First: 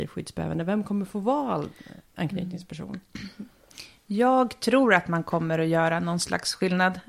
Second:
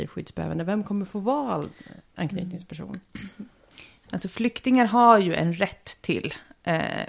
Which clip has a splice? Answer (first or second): second